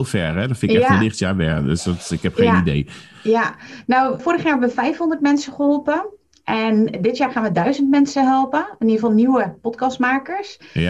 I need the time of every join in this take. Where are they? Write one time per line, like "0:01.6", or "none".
0:04.2